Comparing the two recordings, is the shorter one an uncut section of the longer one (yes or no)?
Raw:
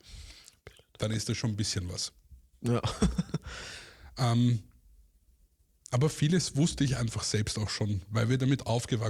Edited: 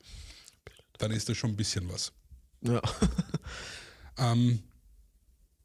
yes